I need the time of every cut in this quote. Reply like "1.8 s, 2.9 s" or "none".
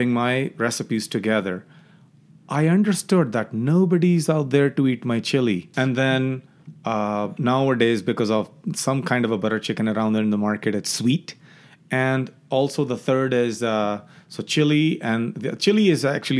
5.7 s

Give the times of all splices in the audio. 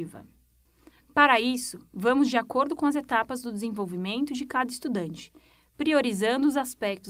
none

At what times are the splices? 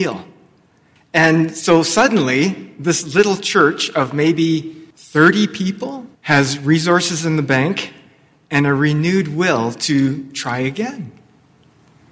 1.0 s, 4.9 s, 6.1 s

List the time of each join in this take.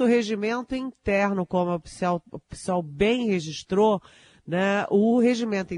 none

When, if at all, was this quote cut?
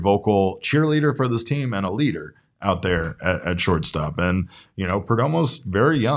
none

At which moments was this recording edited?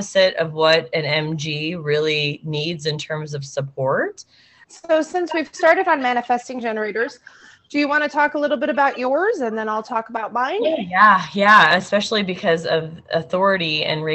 4.6 s

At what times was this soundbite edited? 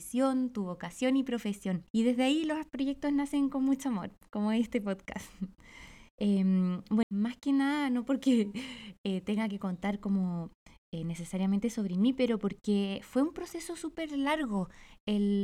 1.9 s, 7.0 s

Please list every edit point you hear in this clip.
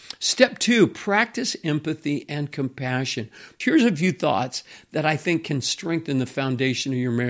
3.6 s

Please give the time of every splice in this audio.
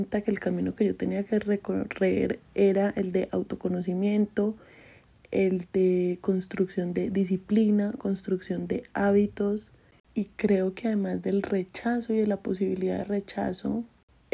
9.9 s

